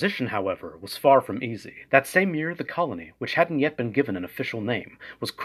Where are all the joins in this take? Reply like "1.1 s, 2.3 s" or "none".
1.9 s